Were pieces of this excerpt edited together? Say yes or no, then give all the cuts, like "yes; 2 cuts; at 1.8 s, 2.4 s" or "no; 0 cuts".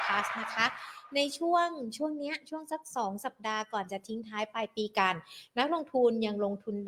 no; 0 cuts